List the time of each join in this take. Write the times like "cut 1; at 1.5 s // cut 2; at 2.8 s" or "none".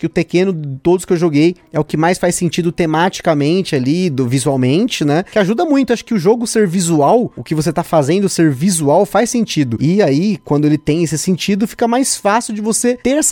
none